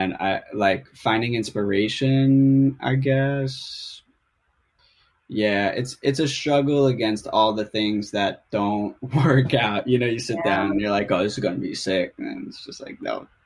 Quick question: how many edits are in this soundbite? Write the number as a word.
zero